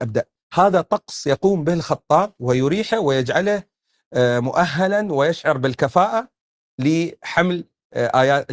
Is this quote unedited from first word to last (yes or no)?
yes